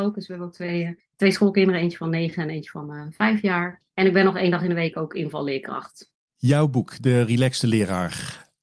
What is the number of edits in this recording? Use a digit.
0